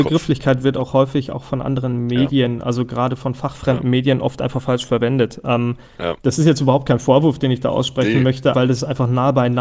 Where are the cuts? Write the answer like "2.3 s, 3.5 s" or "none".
8.5 s